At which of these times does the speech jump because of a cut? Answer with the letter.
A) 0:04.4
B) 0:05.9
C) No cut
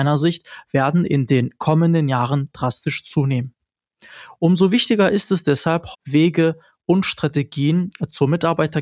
B